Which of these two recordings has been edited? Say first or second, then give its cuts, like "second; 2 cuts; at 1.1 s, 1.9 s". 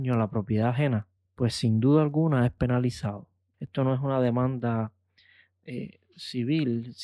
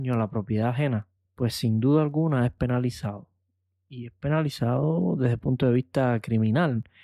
first; 1 cut; at 3.5 s